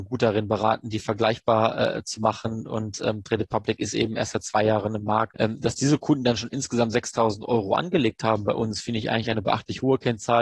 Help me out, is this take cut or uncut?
cut